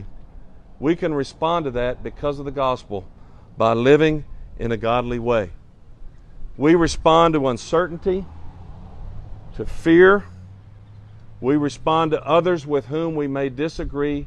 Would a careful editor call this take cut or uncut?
uncut